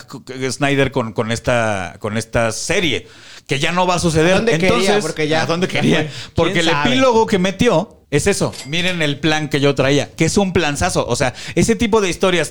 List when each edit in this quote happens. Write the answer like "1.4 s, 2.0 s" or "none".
8.0 s